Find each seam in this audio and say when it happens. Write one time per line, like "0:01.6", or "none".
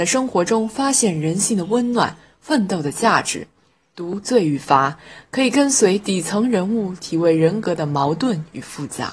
none